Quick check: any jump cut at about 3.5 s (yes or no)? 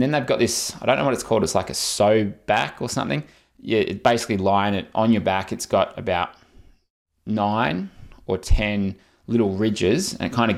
no